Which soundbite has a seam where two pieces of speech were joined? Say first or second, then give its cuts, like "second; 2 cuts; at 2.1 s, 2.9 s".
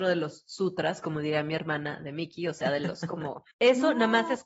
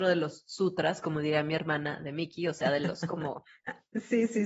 first; 1 cut; at 3.5 s